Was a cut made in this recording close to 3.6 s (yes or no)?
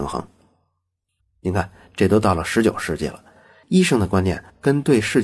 no